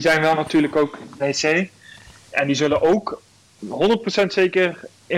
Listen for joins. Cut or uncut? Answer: cut